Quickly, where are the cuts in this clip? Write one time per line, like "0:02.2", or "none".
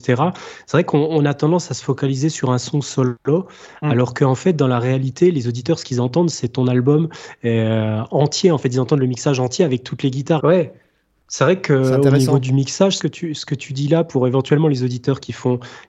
0:10.4
0:13.0